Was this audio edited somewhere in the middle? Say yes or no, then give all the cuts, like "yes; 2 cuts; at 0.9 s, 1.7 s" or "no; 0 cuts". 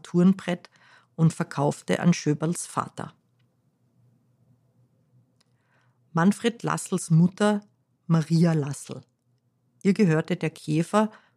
no; 0 cuts